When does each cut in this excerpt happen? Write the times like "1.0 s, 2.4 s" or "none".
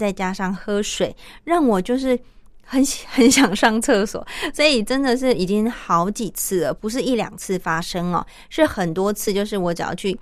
none